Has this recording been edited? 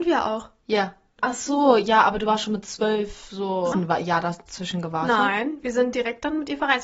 yes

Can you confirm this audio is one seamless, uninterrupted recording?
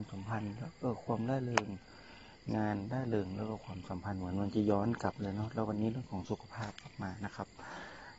yes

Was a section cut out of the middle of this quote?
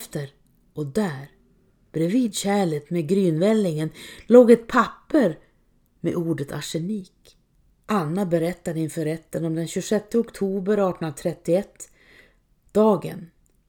yes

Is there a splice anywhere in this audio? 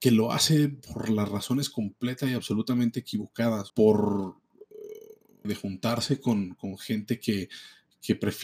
yes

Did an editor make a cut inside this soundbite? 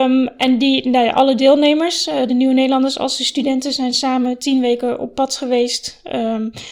no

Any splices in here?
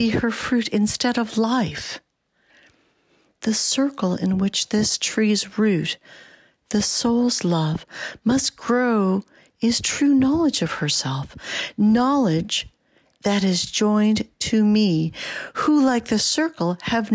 no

